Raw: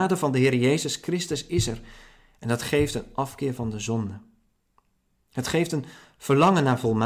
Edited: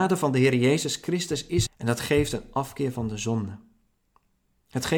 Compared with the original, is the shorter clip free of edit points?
no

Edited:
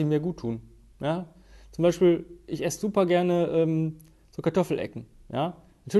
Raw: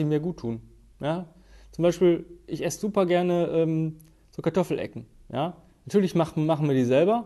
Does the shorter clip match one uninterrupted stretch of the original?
yes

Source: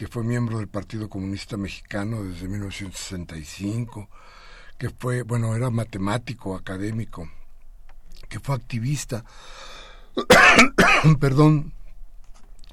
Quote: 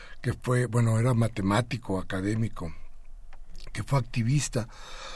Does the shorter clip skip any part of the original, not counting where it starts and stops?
no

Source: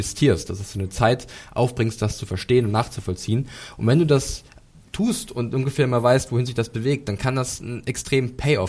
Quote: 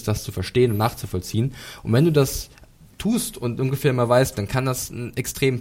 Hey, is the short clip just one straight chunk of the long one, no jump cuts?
no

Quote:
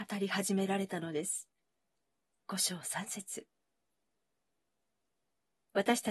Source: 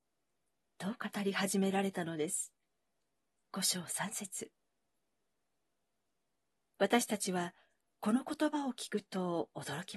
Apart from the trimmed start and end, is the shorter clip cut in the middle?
no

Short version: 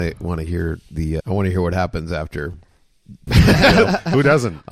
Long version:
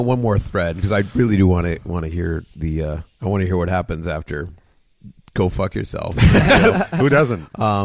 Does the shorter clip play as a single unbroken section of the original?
no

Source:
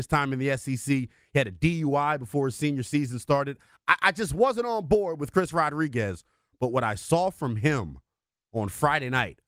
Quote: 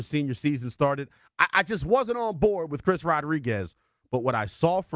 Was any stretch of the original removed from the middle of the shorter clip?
no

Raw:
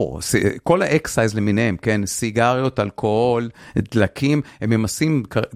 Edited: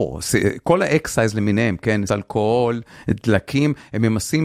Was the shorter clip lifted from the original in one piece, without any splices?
no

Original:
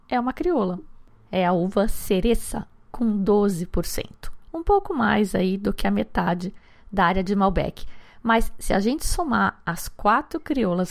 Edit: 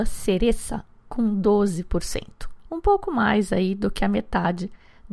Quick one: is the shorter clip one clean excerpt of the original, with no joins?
yes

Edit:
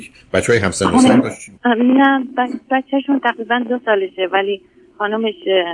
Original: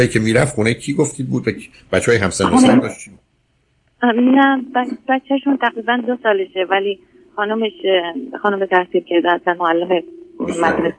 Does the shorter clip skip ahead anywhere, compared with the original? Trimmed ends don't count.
yes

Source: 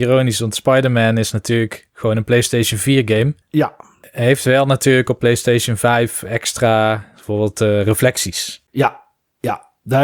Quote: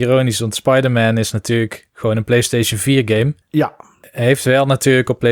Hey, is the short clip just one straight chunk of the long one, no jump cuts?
yes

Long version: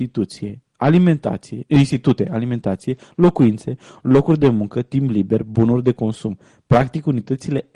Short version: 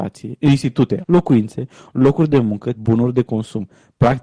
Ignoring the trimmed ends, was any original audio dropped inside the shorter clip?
yes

